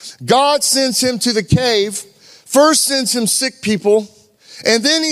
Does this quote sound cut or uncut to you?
uncut